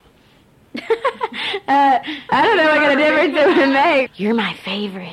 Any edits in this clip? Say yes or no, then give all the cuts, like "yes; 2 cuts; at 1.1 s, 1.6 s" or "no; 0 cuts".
yes; 2 cuts; at 2.3 s, 4.1 s